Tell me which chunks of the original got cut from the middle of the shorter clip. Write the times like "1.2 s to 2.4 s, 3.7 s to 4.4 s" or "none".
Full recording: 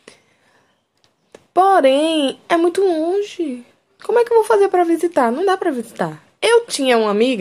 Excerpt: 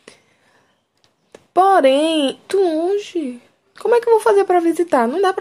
2.5 s to 2.7 s